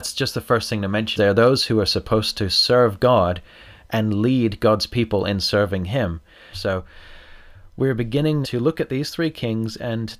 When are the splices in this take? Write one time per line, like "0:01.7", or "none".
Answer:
0:01.2
0:06.5
0:08.4